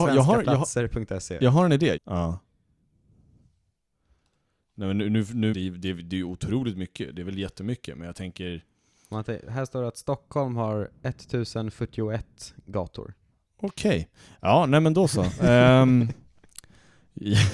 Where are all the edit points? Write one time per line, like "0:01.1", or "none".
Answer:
0:02.0
0:05.5